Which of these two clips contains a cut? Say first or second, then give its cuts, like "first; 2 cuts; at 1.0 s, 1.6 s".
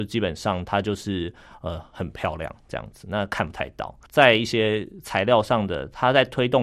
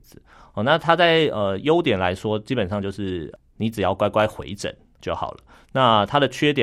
first; 1 cut; at 4.1 s